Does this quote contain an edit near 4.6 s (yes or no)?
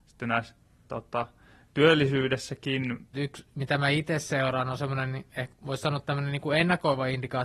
no